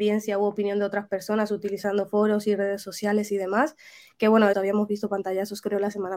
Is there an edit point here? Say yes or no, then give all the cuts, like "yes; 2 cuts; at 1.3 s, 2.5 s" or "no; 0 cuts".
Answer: yes; 1 cut; at 4.5 s